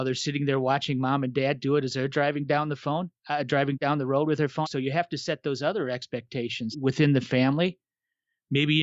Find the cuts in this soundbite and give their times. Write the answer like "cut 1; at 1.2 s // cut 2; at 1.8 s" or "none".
cut 1; at 4.6 s // cut 2; at 6.7 s